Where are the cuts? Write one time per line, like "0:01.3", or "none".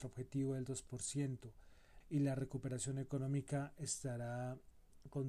0:02.0